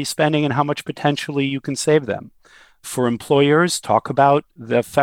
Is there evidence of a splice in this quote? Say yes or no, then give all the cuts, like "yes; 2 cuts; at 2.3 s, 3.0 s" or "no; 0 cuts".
no; 0 cuts